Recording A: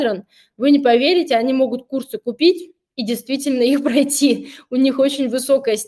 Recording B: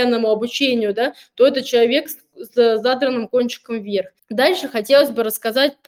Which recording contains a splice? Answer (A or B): B